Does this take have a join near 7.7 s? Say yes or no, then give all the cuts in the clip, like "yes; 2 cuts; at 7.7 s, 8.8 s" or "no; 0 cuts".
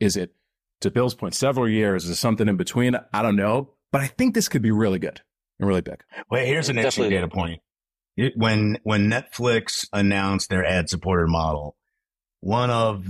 no; 0 cuts